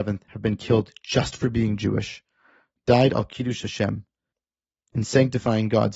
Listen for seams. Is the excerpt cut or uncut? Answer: uncut